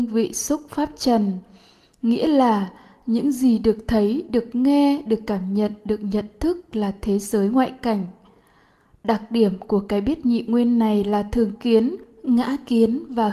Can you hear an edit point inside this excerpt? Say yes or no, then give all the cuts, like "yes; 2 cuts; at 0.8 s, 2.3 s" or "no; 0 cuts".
no; 0 cuts